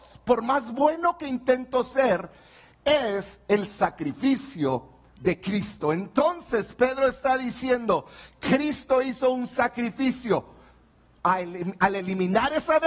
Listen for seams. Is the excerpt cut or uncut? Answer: cut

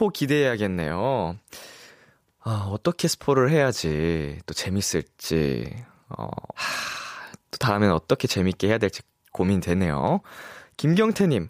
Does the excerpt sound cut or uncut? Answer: cut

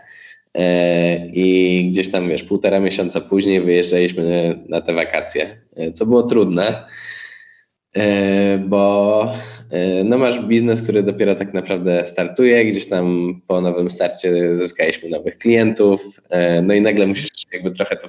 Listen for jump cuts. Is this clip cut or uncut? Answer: uncut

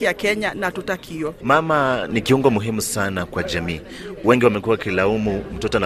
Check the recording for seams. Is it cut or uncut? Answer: cut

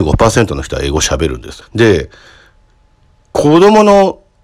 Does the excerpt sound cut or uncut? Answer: cut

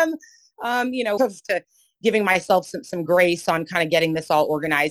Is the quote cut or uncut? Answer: cut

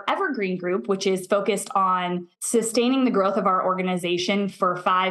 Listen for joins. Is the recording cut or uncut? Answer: cut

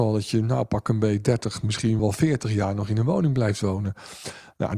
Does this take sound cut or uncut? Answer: cut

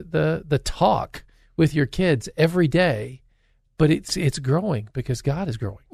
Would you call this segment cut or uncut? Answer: uncut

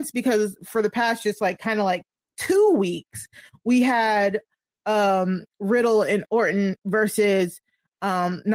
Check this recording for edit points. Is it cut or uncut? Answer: uncut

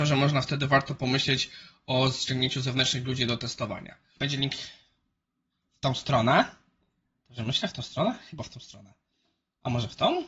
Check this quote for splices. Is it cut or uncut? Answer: cut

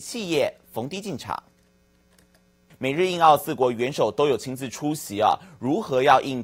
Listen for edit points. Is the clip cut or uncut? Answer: cut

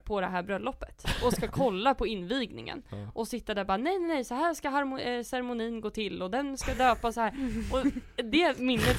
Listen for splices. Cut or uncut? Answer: uncut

